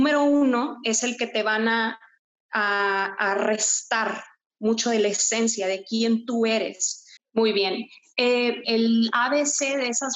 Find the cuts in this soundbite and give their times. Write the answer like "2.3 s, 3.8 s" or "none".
7.2 s, 8.6 s